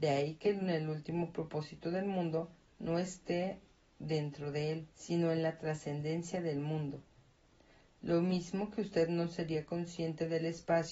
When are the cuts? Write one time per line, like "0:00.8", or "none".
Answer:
0:04.9